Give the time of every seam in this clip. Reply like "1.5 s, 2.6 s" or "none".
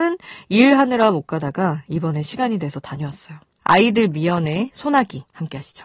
3.6 s